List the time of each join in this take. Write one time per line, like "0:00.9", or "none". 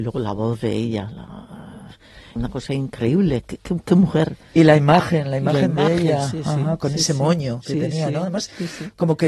0:02.4